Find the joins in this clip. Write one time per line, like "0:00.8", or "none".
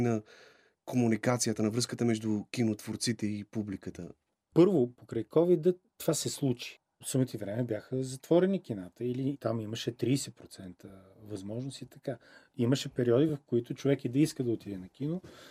none

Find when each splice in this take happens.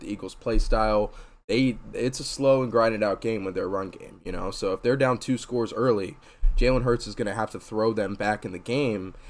none

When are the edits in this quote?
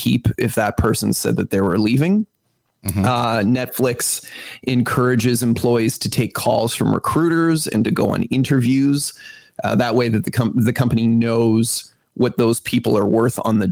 none

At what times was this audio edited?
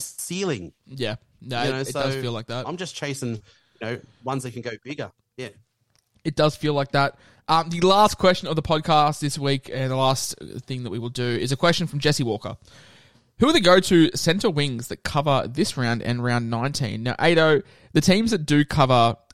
none

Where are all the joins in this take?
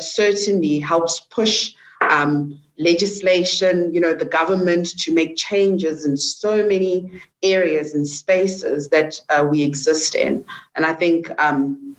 none

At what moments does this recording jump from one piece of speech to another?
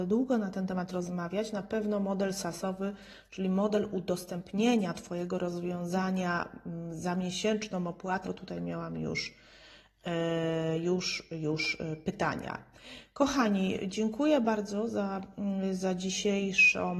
0:08.2

